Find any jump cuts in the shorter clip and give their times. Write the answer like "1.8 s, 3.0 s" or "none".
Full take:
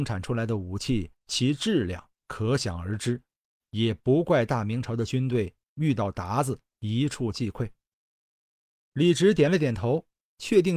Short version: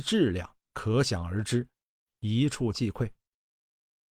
2.1 s

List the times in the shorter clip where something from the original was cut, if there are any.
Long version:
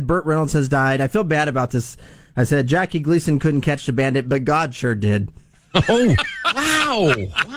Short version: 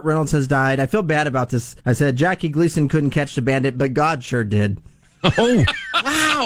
1.8 s

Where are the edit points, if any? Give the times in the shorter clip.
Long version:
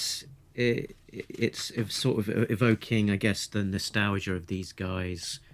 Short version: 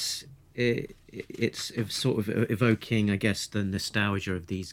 none

